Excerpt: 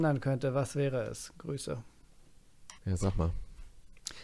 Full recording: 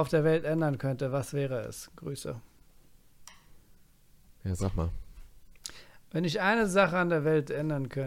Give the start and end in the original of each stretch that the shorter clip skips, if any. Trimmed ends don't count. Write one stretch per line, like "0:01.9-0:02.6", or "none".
0:03.3-0:04.4